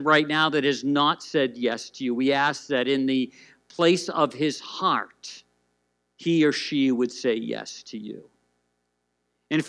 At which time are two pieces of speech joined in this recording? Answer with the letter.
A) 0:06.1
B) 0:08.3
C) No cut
C